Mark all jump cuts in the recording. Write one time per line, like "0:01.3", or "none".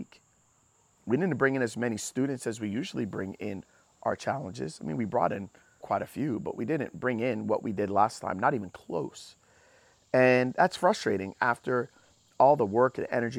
0:05.8